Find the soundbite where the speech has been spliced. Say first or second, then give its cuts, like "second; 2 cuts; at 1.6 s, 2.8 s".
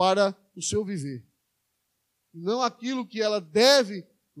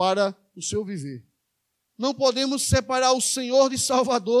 second; 1 cut; at 1.9 s